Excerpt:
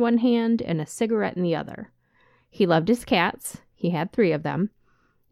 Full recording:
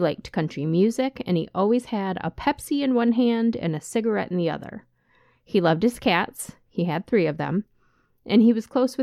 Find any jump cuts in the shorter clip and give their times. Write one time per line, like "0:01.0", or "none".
none